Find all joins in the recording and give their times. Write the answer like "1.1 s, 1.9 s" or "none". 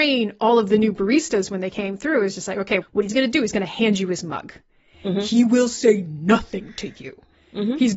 2.8 s